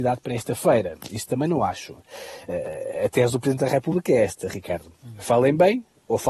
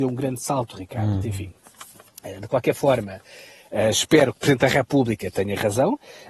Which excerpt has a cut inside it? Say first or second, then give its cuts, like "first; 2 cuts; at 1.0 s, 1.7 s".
second; 1 cut; at 1.2 s